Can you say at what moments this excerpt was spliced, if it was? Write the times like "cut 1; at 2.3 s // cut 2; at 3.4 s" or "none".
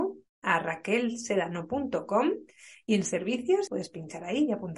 cut 1; at 3.7 s